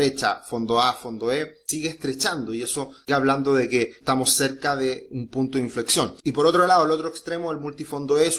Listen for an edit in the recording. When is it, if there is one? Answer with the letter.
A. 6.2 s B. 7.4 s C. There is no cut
C